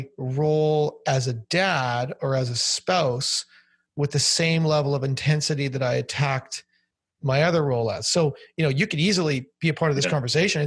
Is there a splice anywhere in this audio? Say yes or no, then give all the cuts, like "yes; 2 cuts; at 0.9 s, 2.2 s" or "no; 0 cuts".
no; 0 cuts